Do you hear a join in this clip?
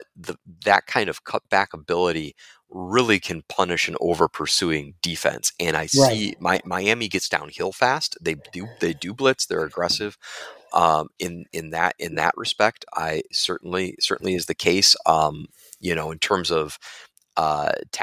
no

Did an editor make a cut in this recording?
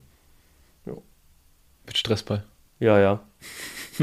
no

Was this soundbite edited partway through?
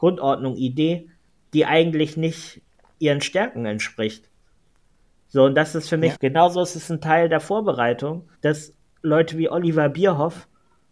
yes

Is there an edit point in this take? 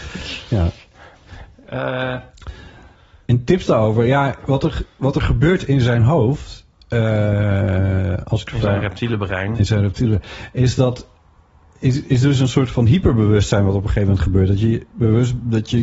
no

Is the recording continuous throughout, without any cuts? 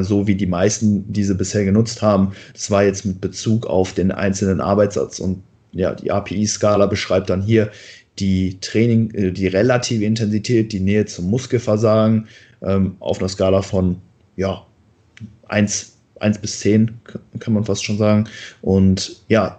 yes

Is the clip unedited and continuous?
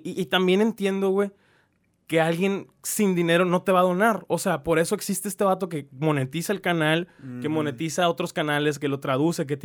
yes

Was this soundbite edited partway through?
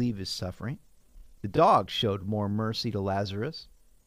no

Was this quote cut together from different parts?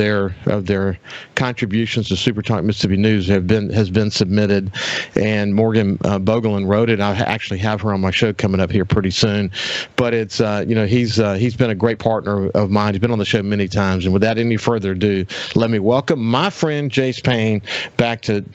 no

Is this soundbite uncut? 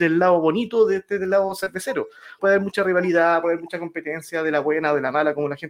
no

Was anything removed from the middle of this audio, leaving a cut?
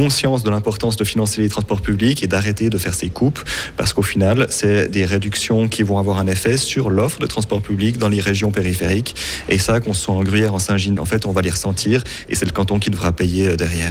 yes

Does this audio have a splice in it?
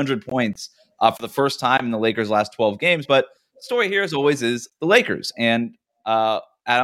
no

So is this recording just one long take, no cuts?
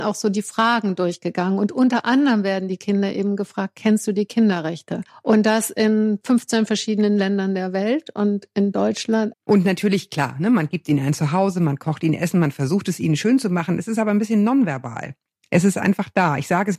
no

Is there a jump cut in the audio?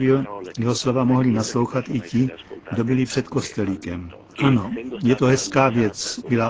yes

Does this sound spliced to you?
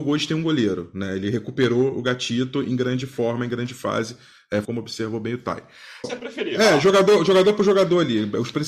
yes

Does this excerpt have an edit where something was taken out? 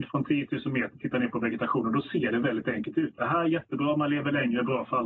no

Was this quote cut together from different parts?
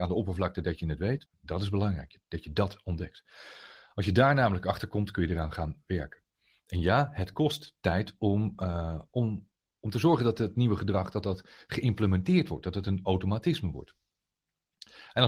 yes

